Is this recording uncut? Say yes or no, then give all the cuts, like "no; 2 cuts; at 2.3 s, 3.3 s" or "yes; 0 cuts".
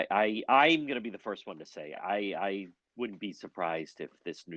yes; 0 cuts